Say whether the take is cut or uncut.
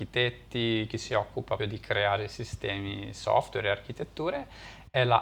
cut